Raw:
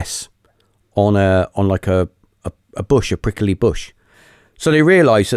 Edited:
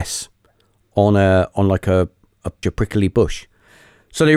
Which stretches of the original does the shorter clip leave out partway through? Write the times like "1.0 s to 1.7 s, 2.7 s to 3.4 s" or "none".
2.6 s to 3.1 s